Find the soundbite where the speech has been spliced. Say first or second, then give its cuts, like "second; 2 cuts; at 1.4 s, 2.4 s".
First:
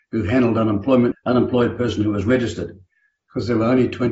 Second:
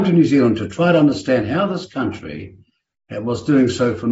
first; 1 cut; at 1.1 s